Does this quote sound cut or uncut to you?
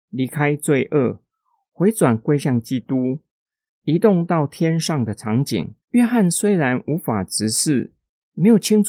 cut